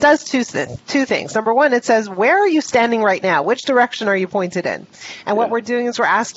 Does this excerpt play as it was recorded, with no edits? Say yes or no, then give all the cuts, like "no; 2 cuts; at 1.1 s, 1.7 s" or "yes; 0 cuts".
yes; 0 cuts